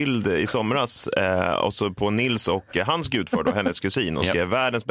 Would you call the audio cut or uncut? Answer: uncut